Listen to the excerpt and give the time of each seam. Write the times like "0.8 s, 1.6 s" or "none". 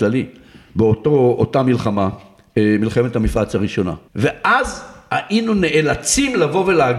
4.1 s